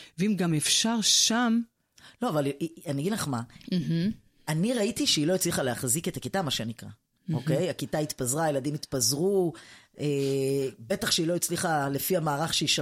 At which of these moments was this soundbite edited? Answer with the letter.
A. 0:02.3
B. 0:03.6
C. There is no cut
C